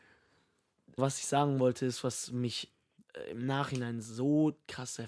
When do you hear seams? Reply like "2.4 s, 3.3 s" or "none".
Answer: 1.0 s